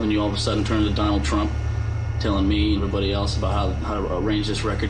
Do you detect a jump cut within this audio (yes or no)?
no